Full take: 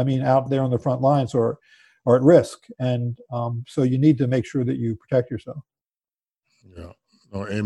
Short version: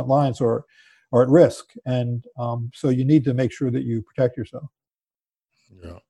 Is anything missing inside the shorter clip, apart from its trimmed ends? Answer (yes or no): no